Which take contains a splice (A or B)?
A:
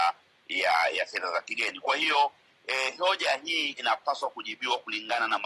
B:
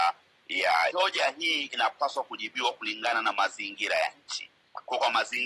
B